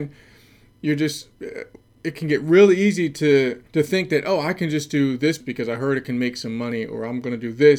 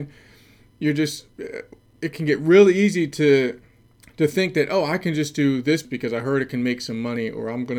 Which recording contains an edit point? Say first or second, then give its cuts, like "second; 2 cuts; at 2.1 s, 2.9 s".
first; 1 cut; at 3.7 s